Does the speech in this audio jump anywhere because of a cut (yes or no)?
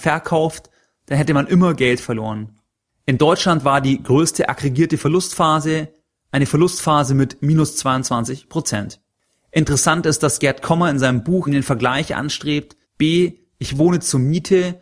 yes